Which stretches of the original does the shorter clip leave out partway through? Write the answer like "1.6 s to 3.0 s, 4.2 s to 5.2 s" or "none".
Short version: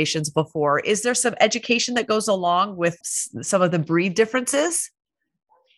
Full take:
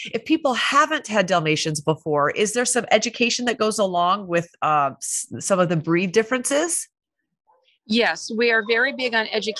4.5 s to 5.0 s